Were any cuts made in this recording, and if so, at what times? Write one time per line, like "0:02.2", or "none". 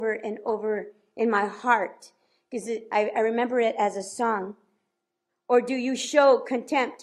0:05.3

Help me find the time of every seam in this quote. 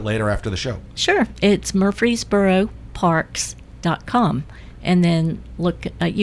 none

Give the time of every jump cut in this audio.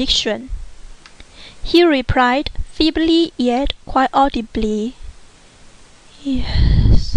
none

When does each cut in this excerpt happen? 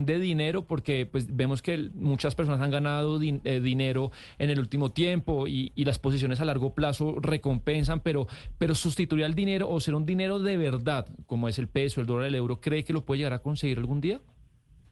none

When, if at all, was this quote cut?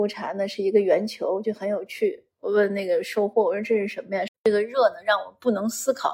0:04.3

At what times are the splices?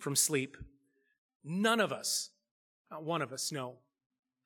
0:01.3

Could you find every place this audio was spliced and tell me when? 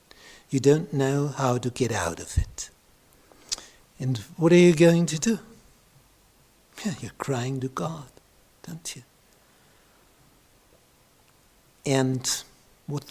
none

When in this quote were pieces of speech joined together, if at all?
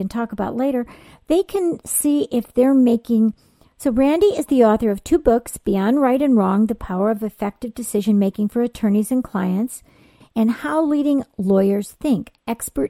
0:03.7
0:10.2

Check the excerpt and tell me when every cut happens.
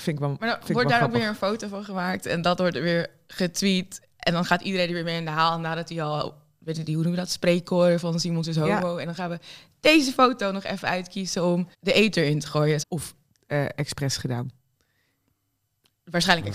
0:06.8
0:11.7
0:12.8

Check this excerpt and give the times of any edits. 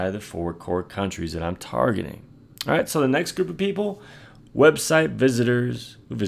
0:02.5

